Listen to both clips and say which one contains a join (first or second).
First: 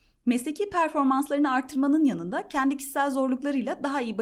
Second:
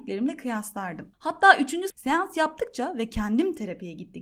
second